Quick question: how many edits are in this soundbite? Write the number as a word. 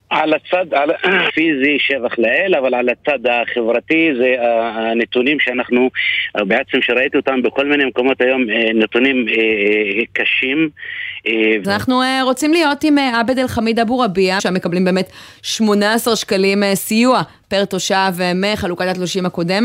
three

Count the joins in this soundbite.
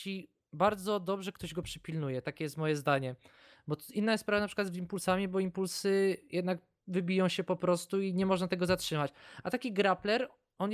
zero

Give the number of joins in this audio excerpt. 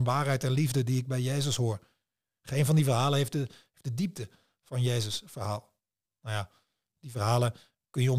one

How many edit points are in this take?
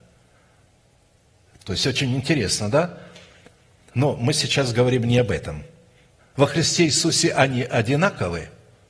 one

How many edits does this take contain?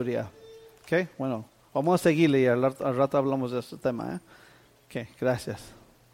zero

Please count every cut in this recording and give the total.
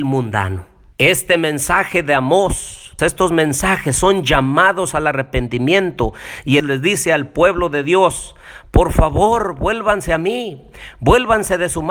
three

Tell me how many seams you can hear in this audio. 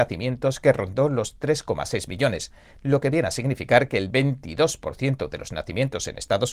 zero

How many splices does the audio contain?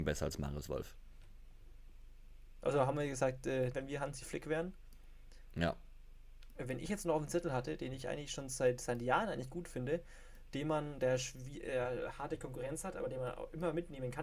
one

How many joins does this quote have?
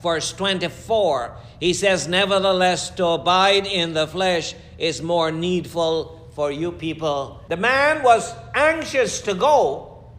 one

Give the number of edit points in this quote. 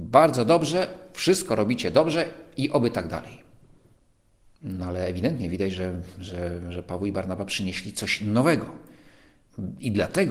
zero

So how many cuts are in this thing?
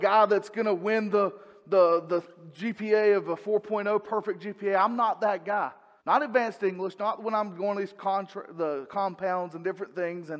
one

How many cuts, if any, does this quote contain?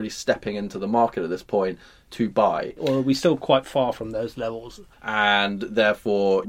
two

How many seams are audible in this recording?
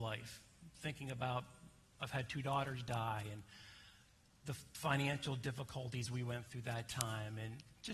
one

